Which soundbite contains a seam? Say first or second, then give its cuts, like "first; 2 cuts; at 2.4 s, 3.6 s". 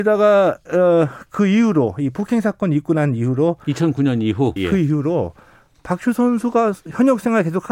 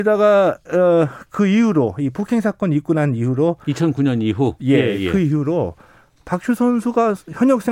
first; 1 cut; at 4.6 s